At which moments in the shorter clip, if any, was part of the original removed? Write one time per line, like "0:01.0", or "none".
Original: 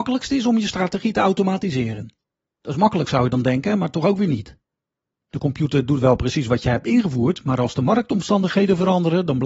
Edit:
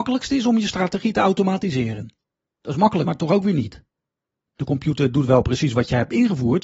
0:03.1